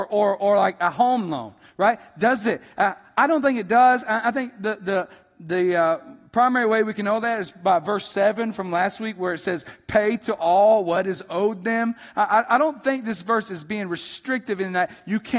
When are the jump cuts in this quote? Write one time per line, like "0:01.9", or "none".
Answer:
none